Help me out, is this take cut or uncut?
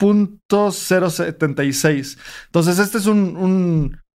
uncut